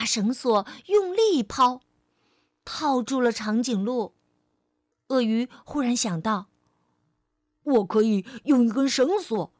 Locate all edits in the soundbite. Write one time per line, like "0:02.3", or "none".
0:04.9

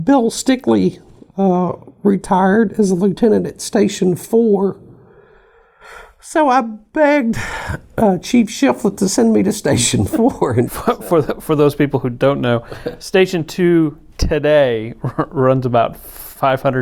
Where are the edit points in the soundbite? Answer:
0:10.7

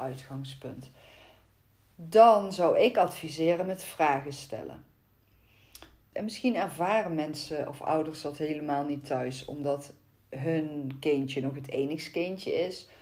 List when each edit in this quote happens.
0:06.1

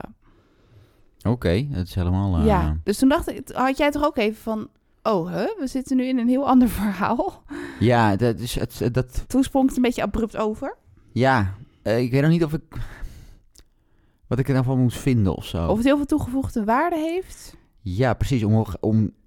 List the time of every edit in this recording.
none

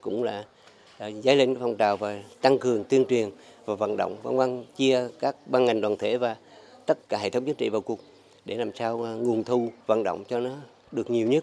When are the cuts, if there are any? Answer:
0:07.0
0:09.8

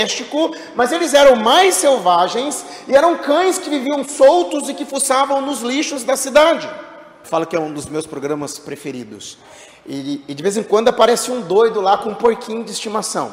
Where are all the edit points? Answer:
0:07.2

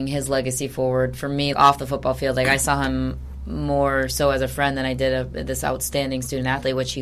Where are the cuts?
0:01.5

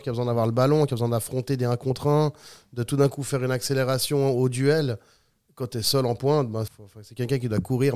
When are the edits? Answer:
0:06.7

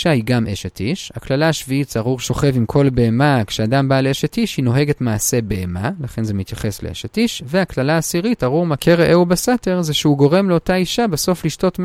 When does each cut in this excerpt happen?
none

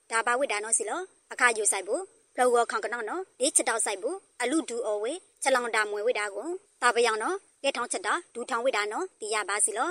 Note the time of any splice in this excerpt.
none

